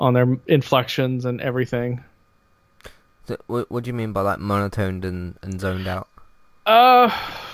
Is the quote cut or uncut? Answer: uncut